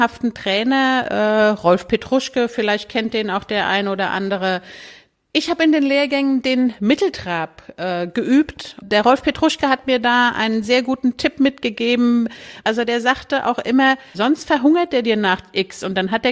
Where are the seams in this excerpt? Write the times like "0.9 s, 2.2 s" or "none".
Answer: 12.6 s, 14.1 s